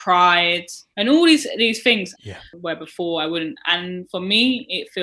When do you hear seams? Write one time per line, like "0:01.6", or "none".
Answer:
0:00.9
0:02.1